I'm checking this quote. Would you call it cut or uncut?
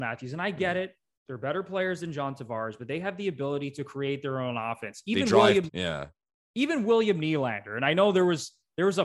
cut